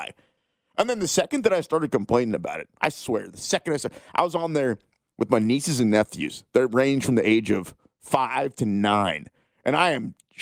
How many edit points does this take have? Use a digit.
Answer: 0